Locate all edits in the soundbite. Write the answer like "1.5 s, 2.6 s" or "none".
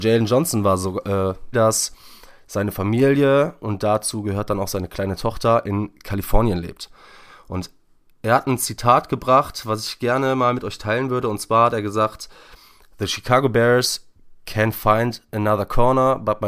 1.5 s